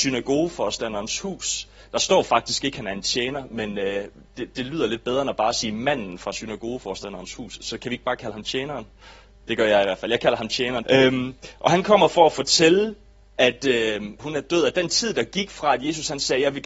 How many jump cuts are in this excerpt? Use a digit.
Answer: 3